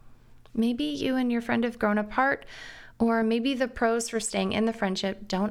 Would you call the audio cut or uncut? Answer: uncut